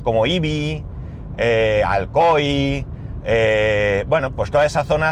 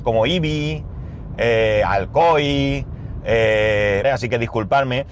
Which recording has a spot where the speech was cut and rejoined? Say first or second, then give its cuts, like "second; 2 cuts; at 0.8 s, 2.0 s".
second; 1 cut; at 4.0 s